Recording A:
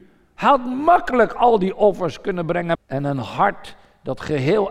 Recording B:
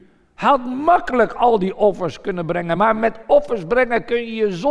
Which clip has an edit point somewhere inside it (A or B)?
A